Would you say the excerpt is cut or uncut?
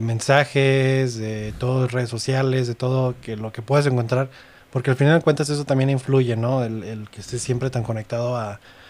uncut